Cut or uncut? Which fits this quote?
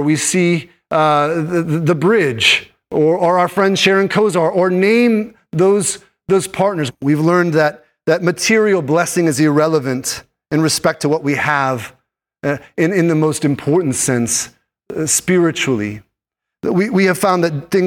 cut